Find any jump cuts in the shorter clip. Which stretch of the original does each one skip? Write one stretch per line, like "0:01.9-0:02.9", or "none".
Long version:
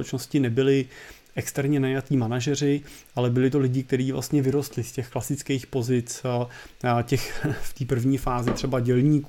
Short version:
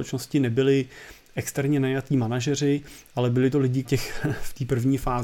0:03.8-0:07.0